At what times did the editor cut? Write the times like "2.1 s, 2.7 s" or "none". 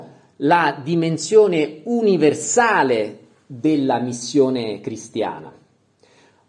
none